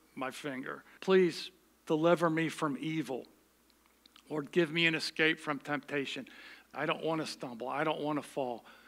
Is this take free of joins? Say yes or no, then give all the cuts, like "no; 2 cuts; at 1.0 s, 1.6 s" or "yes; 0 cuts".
no; 2 cuts; at 1.0 s, 6.7 s